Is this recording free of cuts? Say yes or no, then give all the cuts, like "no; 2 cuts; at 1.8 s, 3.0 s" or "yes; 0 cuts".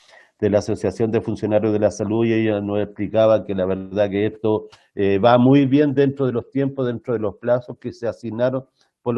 yes; 0 cuts